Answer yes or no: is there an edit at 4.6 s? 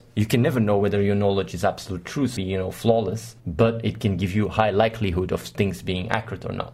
no